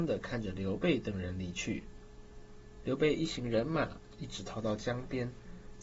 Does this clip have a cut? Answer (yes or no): no